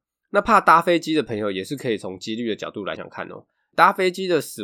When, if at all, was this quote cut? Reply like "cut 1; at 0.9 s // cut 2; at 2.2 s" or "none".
cut 1; at 3.0 s